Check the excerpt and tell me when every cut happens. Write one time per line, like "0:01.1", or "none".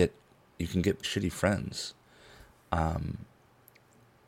0:01.0